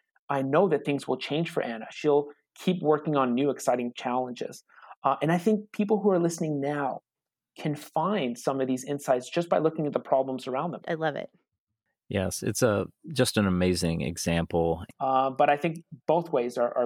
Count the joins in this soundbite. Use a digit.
2